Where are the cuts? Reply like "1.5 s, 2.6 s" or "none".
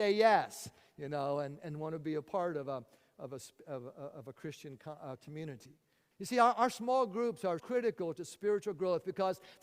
6.1 s, 7.6 s